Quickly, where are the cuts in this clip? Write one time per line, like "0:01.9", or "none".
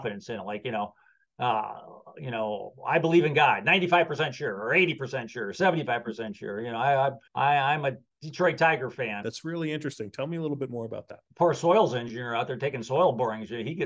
0:07.3
0:09.2
0:11.3